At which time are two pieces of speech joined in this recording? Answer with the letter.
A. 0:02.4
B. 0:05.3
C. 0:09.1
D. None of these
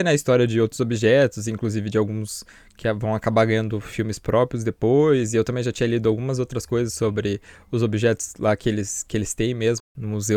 D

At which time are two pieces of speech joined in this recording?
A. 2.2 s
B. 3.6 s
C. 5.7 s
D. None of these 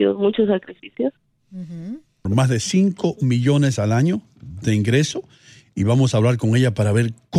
A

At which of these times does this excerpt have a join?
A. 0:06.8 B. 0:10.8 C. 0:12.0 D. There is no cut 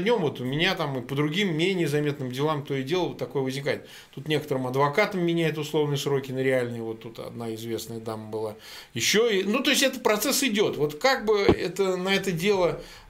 D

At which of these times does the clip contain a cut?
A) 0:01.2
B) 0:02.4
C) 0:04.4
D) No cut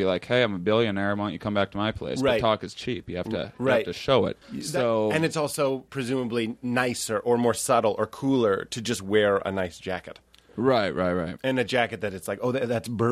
C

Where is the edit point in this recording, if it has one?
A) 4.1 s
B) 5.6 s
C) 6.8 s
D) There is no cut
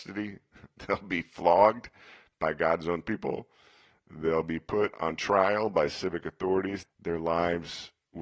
C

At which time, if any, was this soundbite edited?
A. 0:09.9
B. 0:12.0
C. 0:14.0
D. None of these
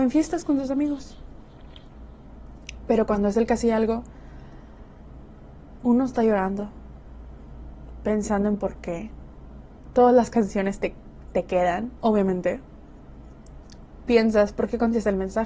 B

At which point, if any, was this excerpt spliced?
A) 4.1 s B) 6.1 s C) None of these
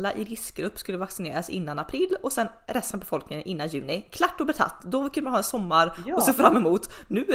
C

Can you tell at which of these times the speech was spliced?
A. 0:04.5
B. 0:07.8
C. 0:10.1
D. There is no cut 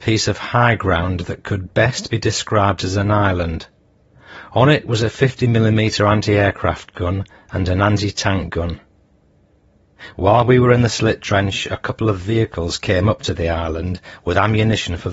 C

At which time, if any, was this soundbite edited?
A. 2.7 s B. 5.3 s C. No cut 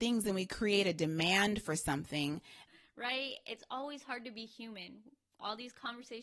A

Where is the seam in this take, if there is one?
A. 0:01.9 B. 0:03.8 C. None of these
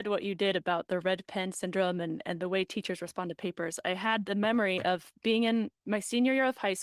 C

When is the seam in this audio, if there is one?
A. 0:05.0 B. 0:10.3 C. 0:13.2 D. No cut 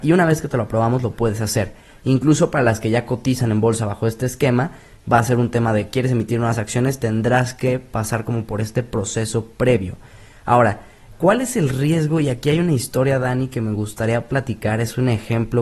D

